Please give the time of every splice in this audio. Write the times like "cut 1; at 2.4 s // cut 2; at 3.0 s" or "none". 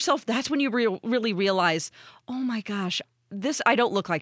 none